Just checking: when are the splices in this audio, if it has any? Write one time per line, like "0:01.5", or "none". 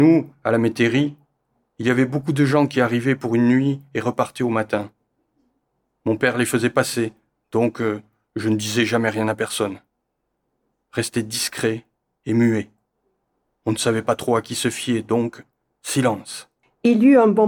none

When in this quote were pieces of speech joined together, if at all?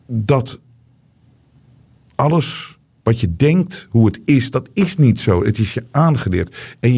none

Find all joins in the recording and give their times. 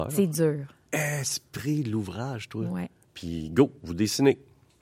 0:03.0

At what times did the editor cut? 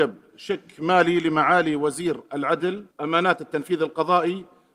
0:02.9

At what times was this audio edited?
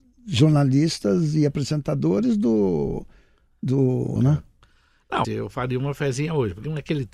0:04.2
0:05.2

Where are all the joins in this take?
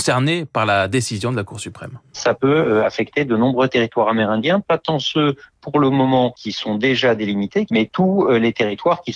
0:07.7

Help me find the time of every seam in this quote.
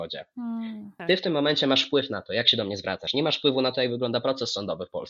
0:01.0

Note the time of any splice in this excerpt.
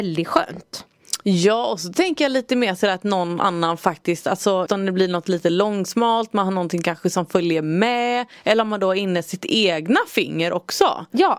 0:04.7

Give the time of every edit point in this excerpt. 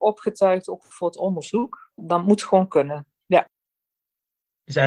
0:01.9

